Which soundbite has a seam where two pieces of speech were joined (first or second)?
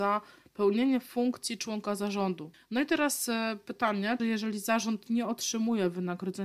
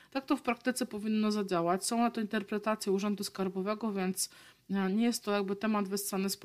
first